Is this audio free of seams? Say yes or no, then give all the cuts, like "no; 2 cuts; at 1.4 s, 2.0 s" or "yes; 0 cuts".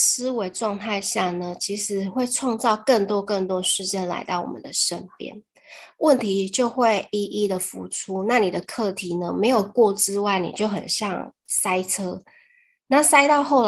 yes; 0 cuts